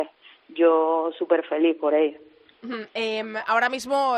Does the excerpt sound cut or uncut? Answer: uncut